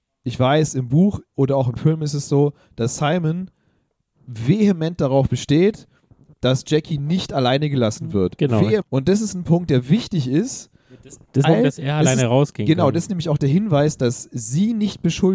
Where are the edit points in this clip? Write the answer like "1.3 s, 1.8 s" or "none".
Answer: 8.8 s, 11.4 s